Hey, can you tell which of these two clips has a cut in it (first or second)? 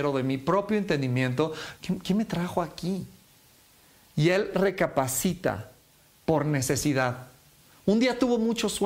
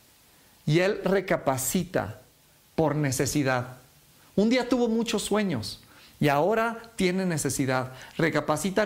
first